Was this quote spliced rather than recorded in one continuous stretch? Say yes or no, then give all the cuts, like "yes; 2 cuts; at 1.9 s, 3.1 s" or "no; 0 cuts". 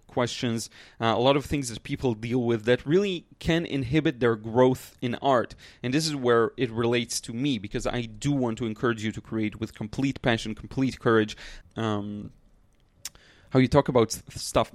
yes; 1 cut; at 11.6 s